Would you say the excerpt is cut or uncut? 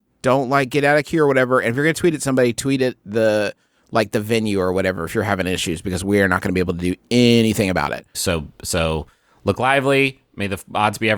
cut